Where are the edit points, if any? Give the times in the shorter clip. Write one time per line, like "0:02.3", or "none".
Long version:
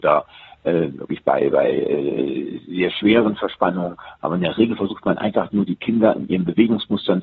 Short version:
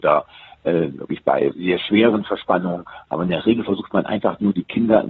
0:01.5